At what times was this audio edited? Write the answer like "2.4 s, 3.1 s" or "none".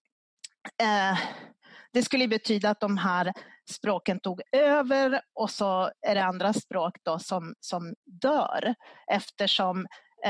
none